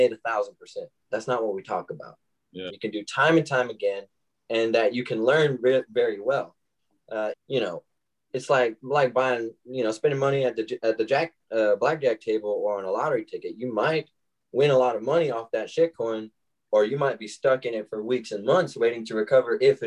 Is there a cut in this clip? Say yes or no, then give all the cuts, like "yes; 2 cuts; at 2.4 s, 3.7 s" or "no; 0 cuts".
yes; 3 cuts; at 1.1 s, 2.7 s, 7.3 s